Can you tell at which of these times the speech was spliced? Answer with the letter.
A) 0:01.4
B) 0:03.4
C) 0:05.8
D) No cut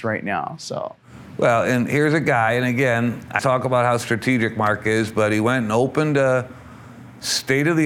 B